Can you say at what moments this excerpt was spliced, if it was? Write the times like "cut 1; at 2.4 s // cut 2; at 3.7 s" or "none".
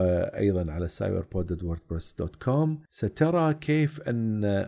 cut 1; at 2.9 s